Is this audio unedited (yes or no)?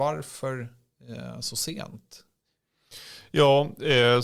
yes